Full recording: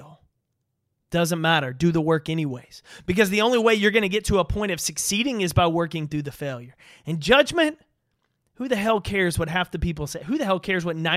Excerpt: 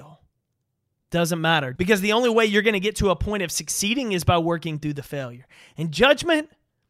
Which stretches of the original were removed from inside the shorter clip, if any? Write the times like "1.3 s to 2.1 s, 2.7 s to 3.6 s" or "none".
1.8 s to 3.0 s